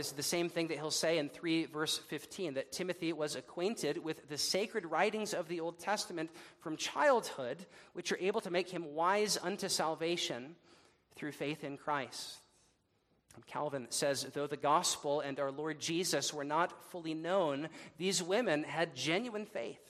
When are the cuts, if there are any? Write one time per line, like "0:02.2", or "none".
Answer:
0:13.2